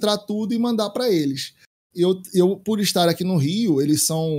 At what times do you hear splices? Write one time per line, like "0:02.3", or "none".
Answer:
0:01.9